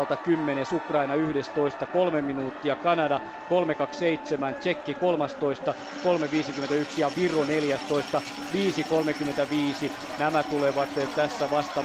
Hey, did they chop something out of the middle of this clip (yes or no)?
no